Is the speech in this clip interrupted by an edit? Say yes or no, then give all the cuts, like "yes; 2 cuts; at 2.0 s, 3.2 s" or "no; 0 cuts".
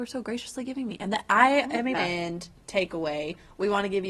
yes; 1 cut; at 1.9 s